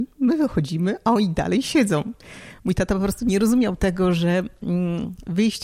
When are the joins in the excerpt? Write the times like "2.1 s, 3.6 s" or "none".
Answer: none